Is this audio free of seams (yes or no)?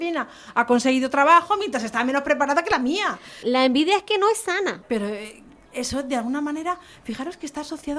no